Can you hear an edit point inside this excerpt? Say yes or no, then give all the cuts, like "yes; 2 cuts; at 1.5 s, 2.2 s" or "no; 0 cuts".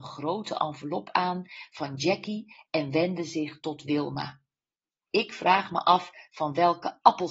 yes; 1 cut; at 5.1 s